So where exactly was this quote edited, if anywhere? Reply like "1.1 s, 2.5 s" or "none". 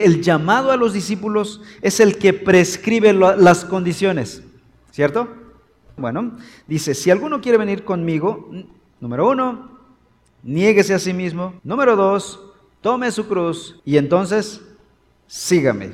6.0 s, 11.6 s, 13.8 s